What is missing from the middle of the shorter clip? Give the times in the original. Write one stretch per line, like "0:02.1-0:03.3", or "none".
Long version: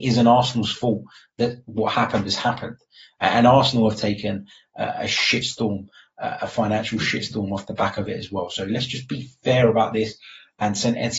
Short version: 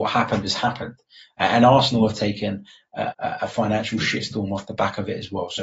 0:04.9-0:06.1